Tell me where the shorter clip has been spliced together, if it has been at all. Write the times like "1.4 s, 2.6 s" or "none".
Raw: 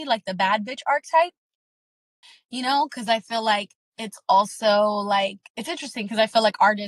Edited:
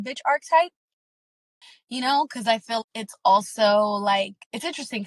2.8 s